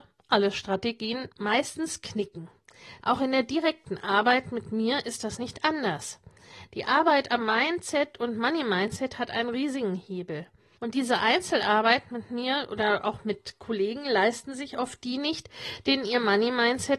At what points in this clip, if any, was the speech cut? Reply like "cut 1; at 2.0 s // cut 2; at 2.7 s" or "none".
cut 1; at 3.0 s